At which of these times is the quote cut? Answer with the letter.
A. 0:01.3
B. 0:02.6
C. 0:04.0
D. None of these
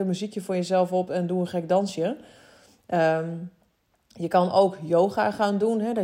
D